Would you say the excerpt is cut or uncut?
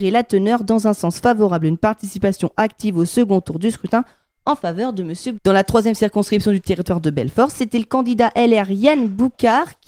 cut